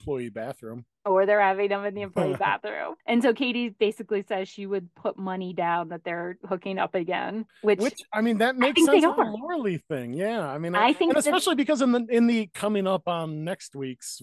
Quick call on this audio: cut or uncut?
uncut